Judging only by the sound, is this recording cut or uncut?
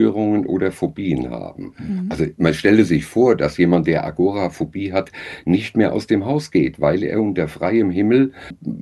uncut